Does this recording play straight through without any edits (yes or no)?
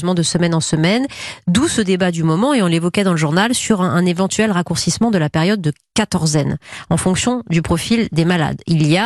yes